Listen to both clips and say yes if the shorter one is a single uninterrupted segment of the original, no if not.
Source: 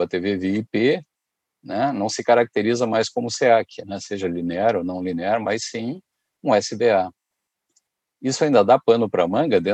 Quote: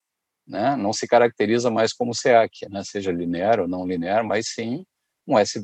yes